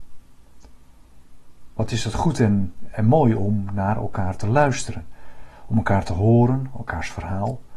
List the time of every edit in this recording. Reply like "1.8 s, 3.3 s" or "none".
none

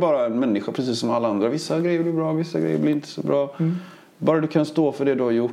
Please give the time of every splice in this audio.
none

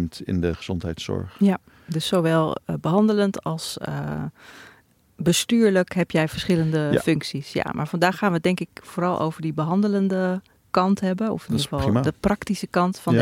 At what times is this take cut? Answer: none

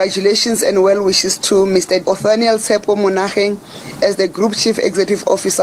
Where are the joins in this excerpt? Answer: 2.1 s

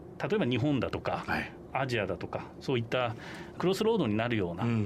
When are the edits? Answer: none

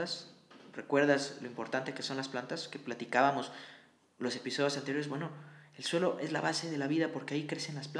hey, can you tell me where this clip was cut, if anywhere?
none

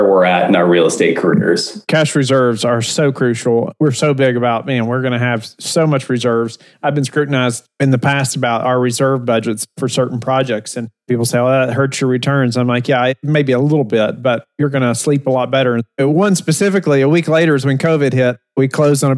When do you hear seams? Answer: none

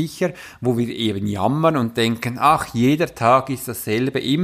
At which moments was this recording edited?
none

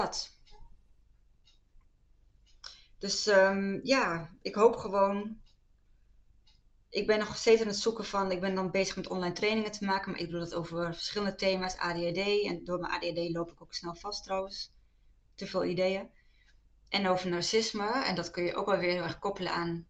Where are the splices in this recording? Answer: none

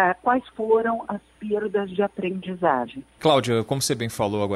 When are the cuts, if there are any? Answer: 3.2 s

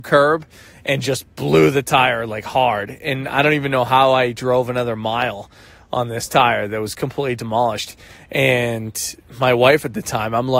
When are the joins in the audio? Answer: none

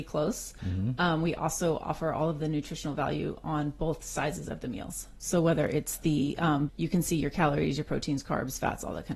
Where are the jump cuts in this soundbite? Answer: 6.7 s

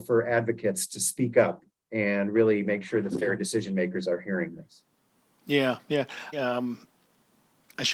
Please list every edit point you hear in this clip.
6.3 s

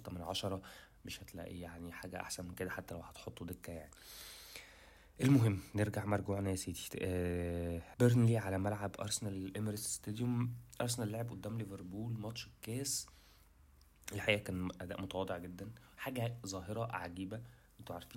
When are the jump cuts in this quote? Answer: 7.9 s

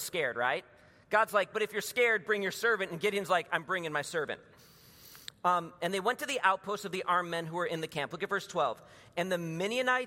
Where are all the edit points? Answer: 1.5 s

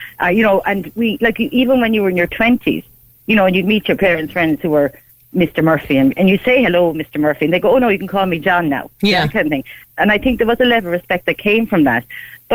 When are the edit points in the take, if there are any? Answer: 9.8 s

